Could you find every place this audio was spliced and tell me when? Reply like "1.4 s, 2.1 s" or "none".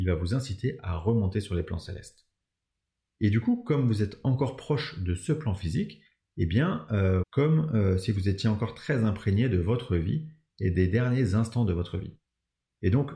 7.2 s